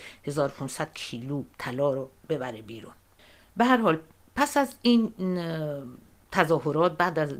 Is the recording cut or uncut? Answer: cut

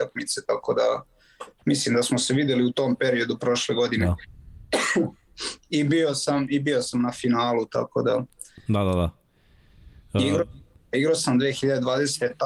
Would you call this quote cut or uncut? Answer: uncut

